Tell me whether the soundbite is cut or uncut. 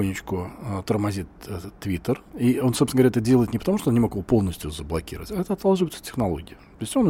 cut